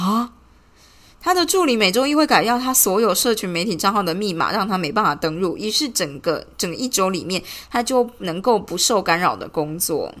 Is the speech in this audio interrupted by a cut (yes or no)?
no